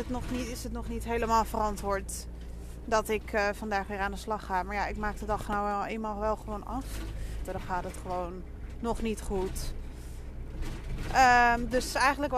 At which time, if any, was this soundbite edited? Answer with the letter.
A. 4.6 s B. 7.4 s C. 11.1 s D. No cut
B